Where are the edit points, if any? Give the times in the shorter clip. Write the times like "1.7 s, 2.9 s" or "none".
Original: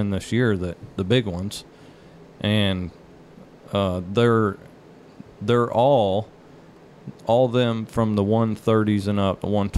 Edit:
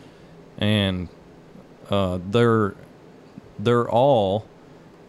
none